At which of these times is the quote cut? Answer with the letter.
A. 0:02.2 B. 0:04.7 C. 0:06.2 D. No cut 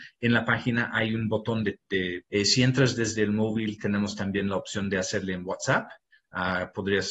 A